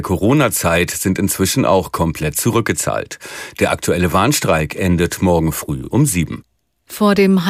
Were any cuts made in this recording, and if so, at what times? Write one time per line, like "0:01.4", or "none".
none